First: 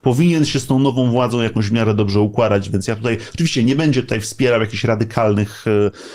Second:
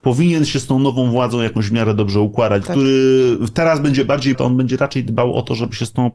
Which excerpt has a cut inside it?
second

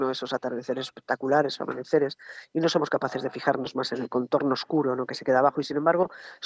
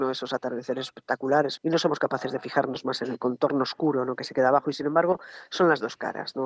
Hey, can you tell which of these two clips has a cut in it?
second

